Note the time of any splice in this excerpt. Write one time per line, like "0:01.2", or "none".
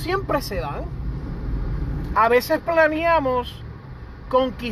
0:02.1